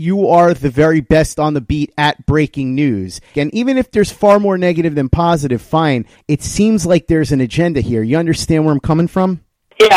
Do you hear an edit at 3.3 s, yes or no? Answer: yes